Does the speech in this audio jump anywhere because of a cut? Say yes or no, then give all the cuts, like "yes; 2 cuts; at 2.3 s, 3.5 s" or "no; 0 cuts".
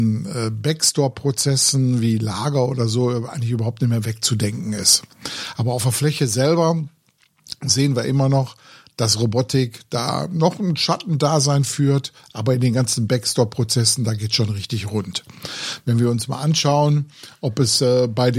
no; 0 cuts